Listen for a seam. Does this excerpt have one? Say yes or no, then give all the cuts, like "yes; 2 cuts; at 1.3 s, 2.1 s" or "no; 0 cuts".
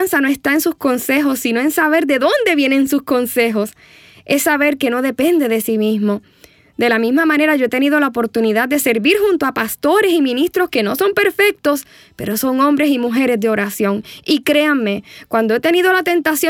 no; 0 cuts